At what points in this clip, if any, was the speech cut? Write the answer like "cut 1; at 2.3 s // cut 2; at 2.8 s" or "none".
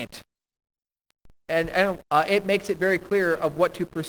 cut 1; at 2.0 s

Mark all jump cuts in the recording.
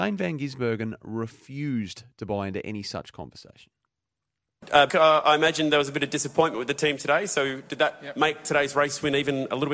cut 1; at 4.9 s

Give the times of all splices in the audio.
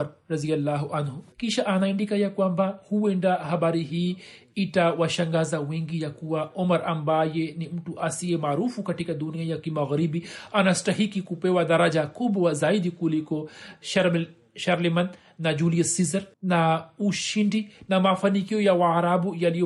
cut 1; at 1.3 s // cut 2; at 16.3 s

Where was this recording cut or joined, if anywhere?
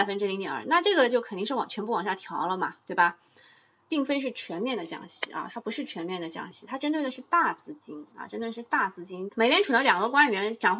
cut 1; at 3.8 s // cut 2; at 9.3 s

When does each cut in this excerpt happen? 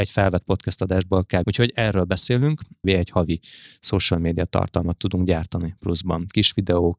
cut 1; at 1.4 s // cut 2; at 2.8 s

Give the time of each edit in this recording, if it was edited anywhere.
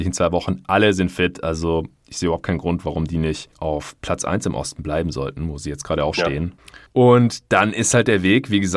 cut 1; at 6.1 s

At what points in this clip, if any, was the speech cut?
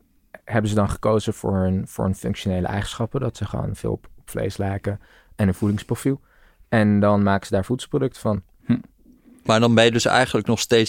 none

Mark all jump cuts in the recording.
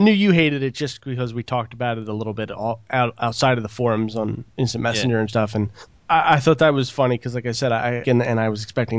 cut 1; at 6.0 s // cut 2; at 8.0 s

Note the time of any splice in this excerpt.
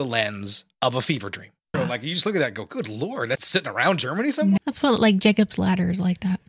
cut 1; at 1.7 s // cut 2; at 3.4 s // cut 3; at 4.6 s

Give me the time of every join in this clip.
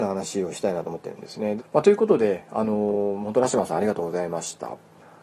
cut 1; at 1.6 s

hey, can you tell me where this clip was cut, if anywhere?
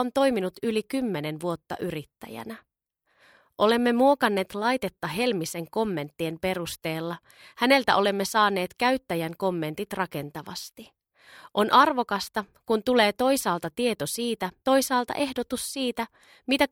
cut 1; at 14.6 s

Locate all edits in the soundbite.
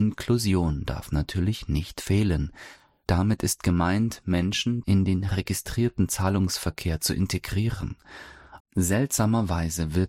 cut 1; at 4.8 s // cut 2; at 8.6 s

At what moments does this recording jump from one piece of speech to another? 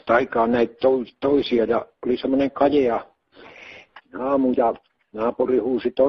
cut 1; at 4.0 s

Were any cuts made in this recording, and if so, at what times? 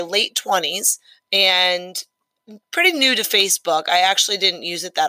none

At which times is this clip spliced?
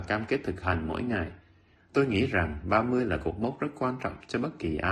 cut 1; at 1.8 s

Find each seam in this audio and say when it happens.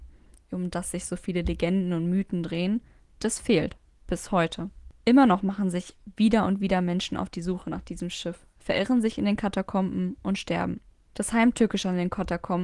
none

